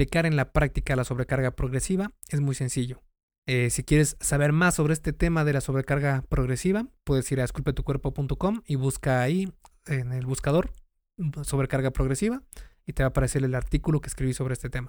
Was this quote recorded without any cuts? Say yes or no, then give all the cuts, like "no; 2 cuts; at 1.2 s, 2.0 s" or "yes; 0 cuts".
no; 1 cut; at 3.4 s